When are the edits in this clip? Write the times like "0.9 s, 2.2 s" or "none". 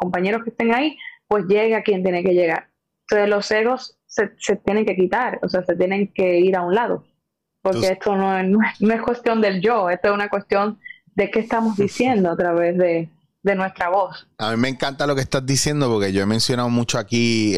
none